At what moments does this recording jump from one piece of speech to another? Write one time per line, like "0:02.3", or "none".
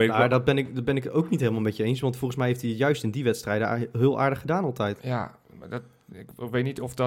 none